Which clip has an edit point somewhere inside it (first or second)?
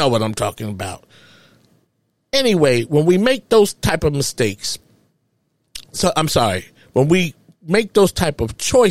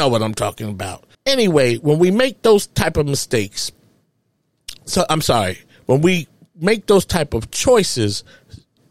second